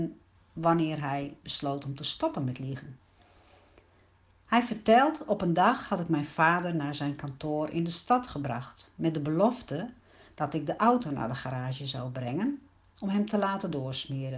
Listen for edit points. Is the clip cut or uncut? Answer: uncut